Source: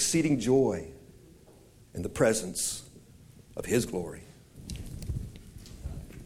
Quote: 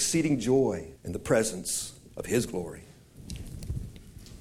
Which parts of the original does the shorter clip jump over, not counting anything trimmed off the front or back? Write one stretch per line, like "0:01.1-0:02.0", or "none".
0:00.9-0:01.8
0:03.0-0:03.5